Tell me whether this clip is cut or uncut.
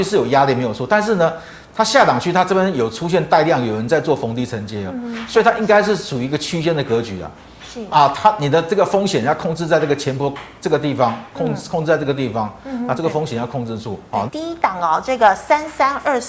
cut